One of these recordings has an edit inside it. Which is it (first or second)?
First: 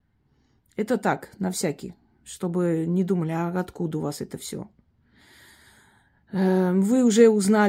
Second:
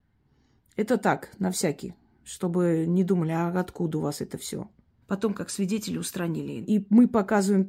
second